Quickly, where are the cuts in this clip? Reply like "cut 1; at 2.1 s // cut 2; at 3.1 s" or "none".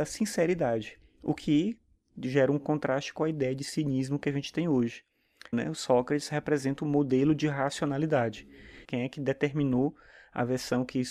cut 1; at 5.5 s // cut 2; at 8.8 s

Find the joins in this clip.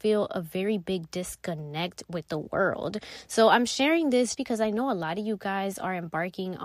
cut 1; at 4.3 s

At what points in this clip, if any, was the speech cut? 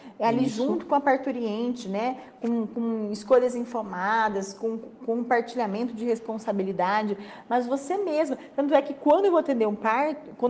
none

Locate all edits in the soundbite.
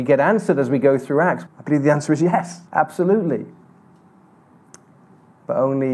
cut 1; at 1.5 s // cut 2; at 2.7 s

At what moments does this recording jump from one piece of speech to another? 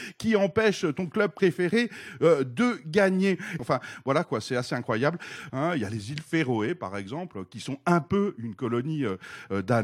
cut 1; at 3.6 s // cut 2; at 5.5 s

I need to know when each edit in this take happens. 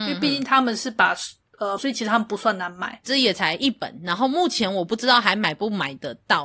cut 1; at 1.8 s // cut 2; at 3.0 s

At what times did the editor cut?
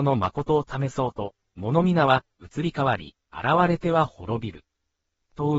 cut 1; at 1.4 s

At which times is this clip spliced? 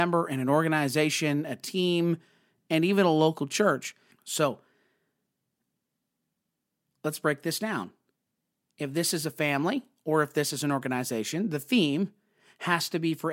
cut 1; at 4.1 s

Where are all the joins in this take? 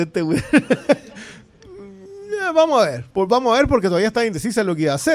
cut 1; at 3.1 s

